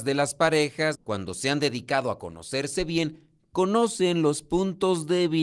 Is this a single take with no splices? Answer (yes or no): no